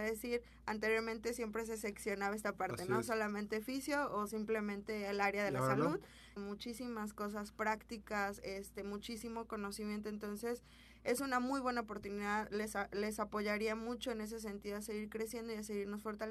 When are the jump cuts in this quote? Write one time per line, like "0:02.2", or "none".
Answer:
0:06.4